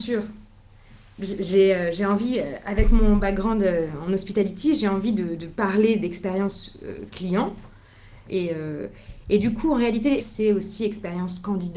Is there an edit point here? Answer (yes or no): yes